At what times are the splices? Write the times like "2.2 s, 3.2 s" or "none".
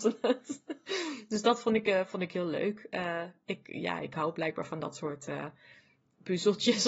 none